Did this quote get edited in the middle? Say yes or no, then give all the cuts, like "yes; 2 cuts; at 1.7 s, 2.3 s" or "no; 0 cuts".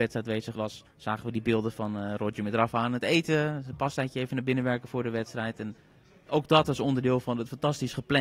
no; 0 cuts